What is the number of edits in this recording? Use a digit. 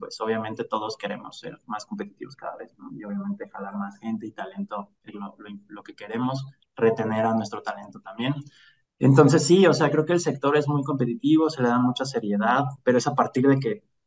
1